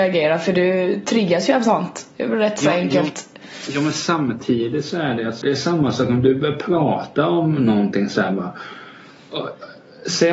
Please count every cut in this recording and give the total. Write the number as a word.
one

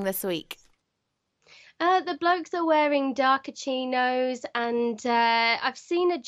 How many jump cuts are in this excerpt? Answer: zero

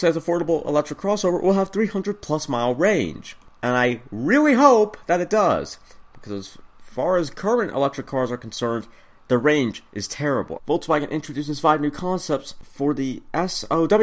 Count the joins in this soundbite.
one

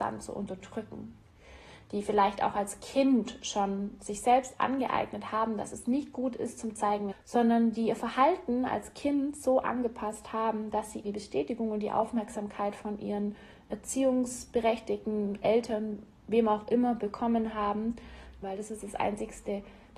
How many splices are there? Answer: three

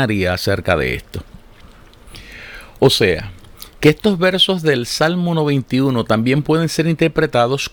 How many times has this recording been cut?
one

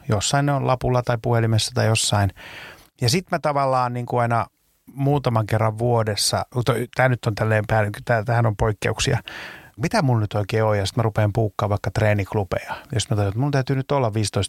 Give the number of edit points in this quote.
one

